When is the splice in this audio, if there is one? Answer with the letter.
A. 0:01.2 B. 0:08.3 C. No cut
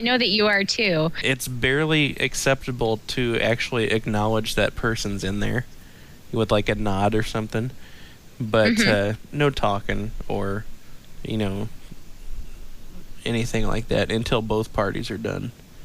A